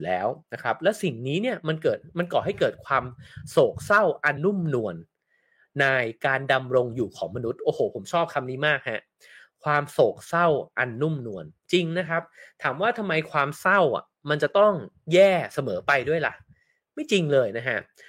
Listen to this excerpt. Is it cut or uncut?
cut